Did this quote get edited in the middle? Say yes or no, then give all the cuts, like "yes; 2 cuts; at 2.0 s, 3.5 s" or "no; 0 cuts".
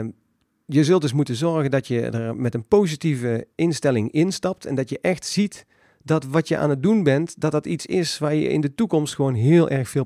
no; 0 cuts